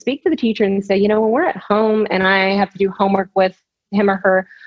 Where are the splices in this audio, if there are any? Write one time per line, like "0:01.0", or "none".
none